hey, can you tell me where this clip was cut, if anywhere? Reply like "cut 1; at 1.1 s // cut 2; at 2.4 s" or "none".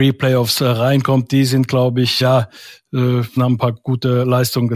cut 1; at 2.2 s // cut 2; at 3.4 s